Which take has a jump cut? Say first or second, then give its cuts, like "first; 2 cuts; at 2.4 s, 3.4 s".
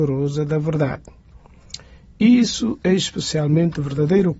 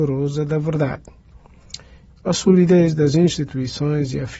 second; 1 cut; at 2.1 s